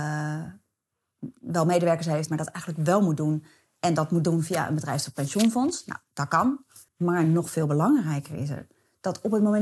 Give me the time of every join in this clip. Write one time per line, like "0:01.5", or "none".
0:02.3
0:06.9